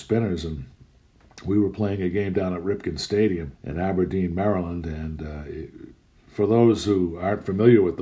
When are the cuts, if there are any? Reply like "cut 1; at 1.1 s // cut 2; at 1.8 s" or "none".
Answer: cut 1; at 3.5 s